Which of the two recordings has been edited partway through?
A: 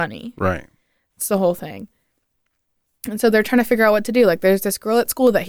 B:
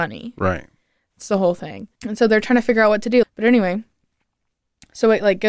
B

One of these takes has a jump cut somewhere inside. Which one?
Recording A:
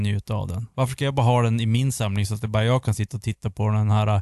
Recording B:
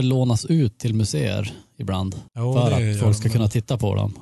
B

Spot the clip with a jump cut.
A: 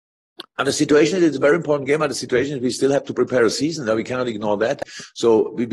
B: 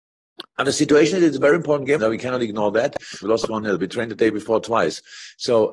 B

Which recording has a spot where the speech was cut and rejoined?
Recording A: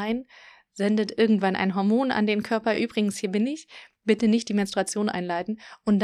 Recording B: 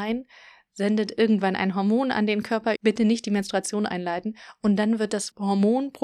B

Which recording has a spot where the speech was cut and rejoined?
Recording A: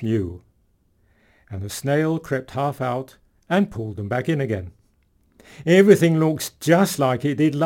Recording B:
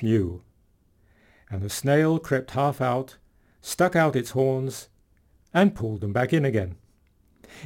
A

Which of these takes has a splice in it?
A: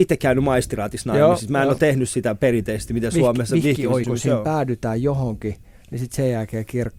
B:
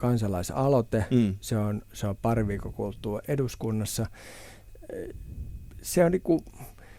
A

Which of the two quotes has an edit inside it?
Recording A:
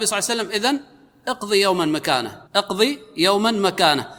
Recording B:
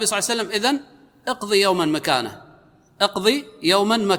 A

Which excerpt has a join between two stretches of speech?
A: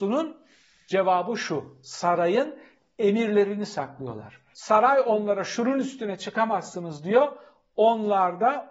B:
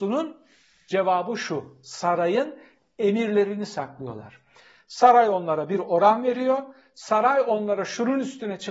A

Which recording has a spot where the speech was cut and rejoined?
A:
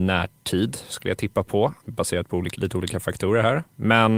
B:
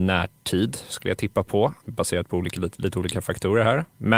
A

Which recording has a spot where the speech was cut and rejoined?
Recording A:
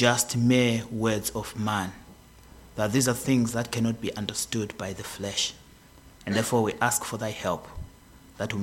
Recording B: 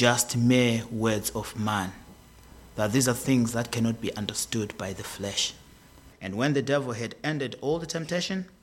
B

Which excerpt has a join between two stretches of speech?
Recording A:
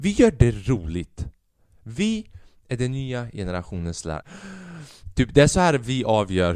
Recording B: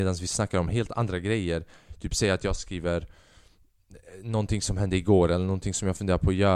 A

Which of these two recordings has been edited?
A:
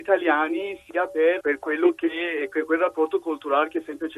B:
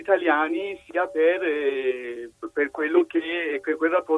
A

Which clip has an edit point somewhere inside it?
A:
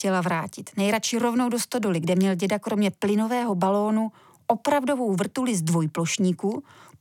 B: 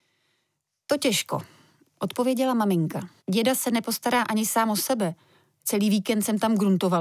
B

